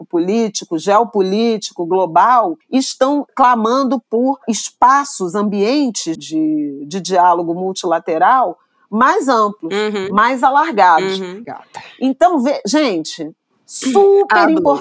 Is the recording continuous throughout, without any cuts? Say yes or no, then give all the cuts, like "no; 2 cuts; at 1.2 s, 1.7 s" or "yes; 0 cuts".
no; 2 cuts; at 6.2 s, 11.4 s